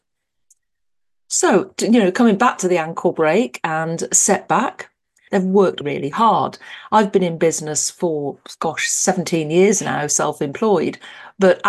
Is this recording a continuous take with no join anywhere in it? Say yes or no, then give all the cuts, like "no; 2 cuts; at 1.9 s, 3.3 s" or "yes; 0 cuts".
no; 1 cut; at 5.3 s